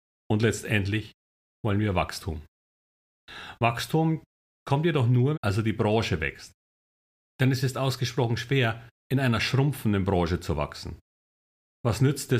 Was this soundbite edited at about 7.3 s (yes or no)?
no